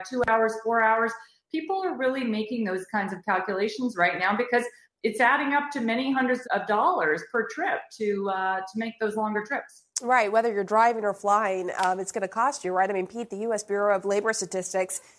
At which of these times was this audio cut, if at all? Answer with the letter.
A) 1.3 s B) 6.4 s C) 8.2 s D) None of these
B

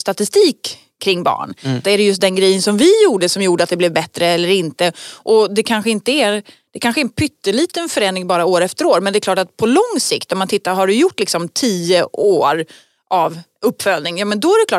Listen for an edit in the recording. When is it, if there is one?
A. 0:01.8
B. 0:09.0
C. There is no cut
A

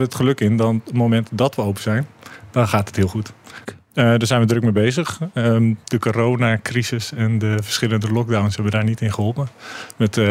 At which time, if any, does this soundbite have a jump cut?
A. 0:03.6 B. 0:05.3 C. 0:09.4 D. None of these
A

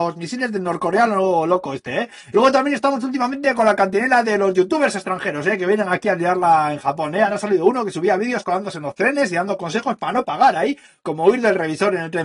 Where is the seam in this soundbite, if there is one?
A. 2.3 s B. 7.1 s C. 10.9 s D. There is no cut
A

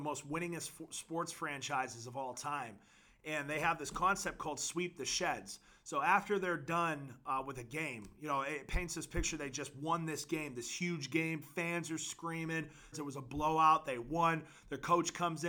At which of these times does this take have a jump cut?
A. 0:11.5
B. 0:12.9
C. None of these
B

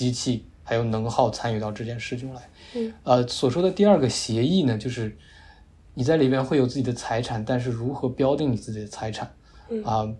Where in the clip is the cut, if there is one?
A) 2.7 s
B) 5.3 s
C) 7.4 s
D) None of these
D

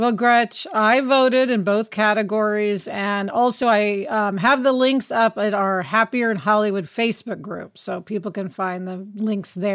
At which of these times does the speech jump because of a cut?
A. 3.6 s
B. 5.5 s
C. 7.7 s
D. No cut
D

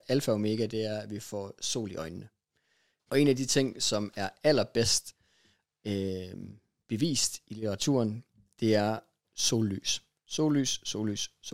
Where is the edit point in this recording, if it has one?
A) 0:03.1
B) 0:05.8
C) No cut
A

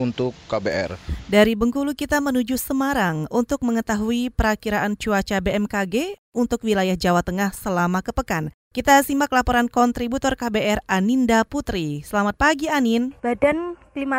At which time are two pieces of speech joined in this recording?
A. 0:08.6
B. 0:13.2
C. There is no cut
B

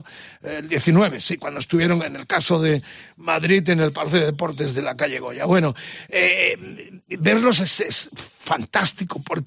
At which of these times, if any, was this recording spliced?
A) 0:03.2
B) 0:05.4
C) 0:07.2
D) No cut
D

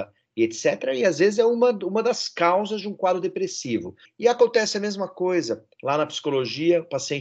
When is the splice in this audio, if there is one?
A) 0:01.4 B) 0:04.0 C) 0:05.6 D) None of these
B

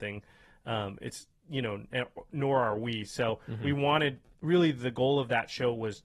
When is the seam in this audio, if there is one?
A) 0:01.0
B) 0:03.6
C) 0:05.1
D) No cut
D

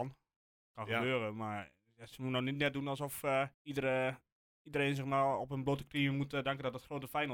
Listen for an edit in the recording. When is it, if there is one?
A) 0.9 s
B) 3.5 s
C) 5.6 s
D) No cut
B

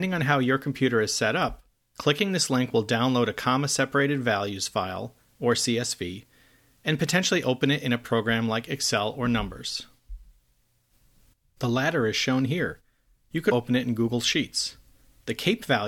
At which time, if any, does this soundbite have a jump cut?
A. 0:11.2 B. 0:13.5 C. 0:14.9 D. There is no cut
B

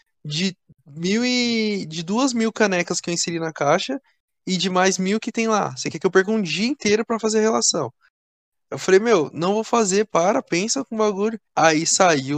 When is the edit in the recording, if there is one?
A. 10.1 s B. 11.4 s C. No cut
B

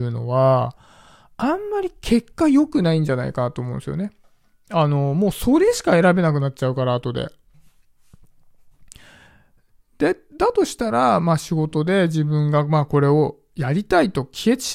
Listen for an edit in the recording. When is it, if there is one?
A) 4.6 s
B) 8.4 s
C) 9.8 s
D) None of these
D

